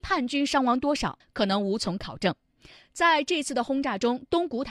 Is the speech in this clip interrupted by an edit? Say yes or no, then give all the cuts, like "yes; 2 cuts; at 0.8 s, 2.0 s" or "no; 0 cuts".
yes; 1 cut; at 1.2 s